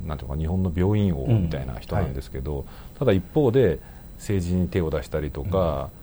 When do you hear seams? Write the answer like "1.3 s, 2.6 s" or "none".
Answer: none